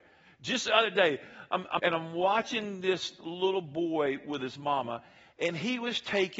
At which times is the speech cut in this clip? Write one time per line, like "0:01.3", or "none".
0:01.8